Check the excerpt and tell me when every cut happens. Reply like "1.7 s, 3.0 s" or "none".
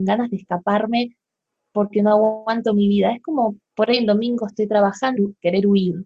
3.6 s, 5.2 s